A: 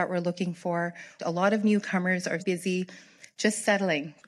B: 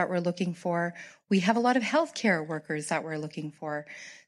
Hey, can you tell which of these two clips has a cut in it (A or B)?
A